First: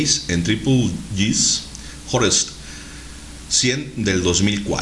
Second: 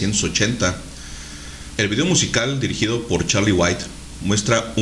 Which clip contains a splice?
second; 1 cut; at 1.8 s

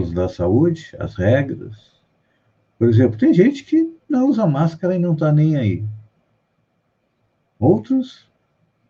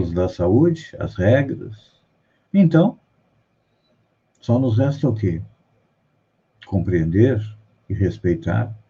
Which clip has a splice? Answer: second; 1 cut; at 2.4 s

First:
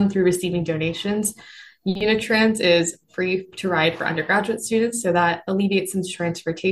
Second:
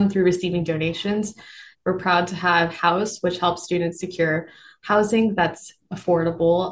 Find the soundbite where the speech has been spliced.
second; 2 cuts; at 1.7 s, 3.2 s

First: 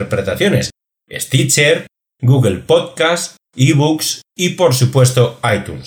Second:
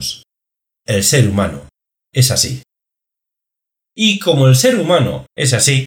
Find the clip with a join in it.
first; 1 cut; at 0.9 s

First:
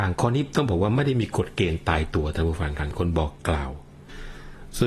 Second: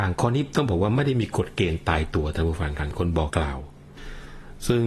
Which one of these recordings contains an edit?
second; 1 cut; at 3.3 s

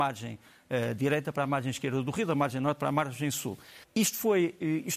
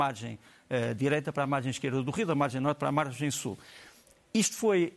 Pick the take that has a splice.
first; 1 cut; at 3.8 s

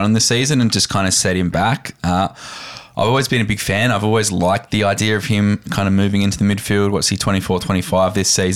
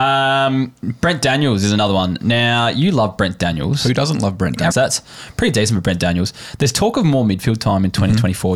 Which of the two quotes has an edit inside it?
second; 1 cut; at 4.7 s

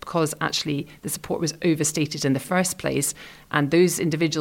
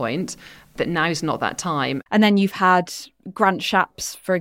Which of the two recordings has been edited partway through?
second; 1 cut; at 2.1 s

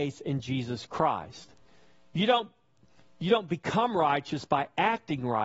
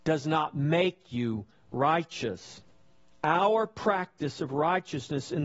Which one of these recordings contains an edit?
second; 1 cut; at 3.1 s

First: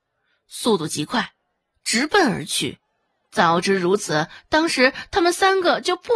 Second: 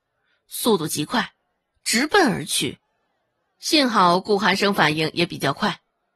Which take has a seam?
first; 1 cut; at 3.2 s

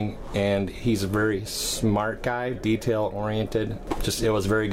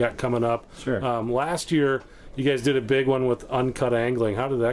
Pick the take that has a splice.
first; 1 cut; at 2.6 s

